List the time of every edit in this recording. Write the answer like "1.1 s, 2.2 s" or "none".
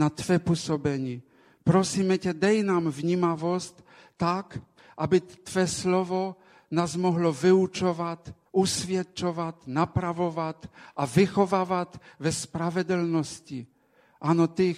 8.5 s

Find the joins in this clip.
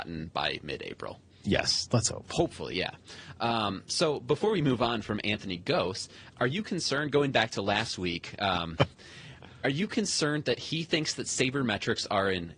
6.3 s

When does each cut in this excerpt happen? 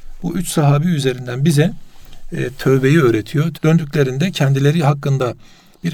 3.5 s

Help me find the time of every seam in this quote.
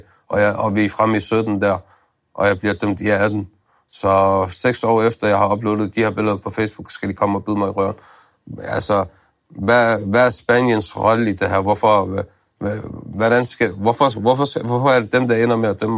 none

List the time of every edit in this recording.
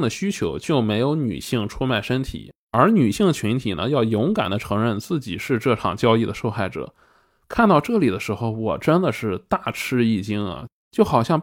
none

